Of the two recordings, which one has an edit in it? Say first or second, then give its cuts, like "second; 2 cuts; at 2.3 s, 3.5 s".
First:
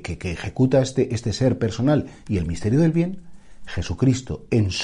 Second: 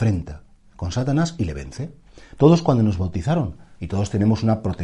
second; 2 cuts; at 2.4 s, 3.8 s